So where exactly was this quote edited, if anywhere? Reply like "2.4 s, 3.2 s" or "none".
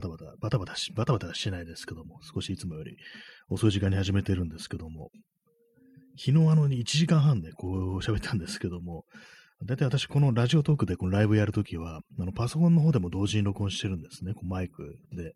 none

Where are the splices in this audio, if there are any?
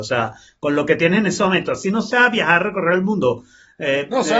none

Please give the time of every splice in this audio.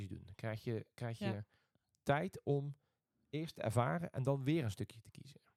none

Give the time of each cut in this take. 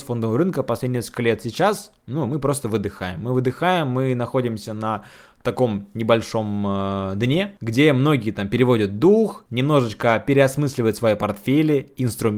none

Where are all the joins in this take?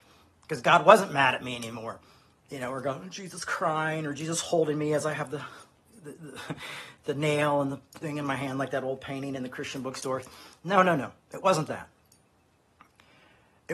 none

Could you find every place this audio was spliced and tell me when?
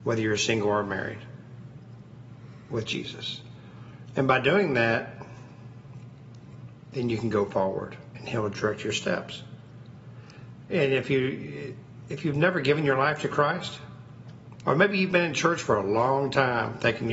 14.6 s

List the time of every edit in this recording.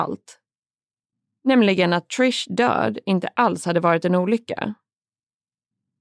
1.4 s

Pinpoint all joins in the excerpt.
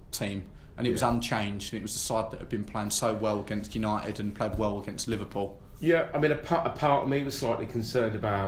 none

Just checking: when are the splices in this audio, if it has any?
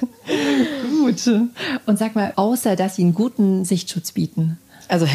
2.3 s

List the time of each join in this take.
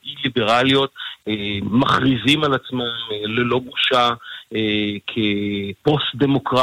none

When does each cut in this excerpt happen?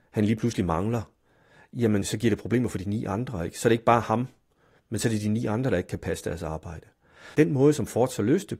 7.3 s

